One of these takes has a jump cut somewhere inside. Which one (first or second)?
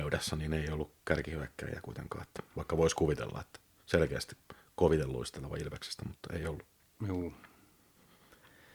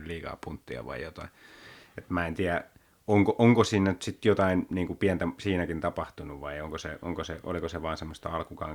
first